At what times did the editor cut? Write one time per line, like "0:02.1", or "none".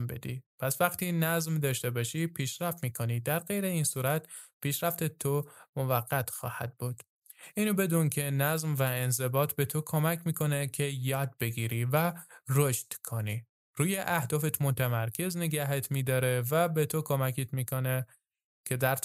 none